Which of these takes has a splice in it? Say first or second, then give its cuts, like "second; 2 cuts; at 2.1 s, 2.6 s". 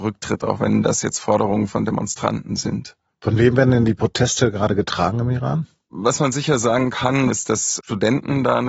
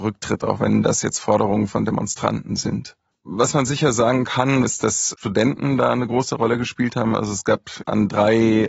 second; 1 cut; at 3.1 s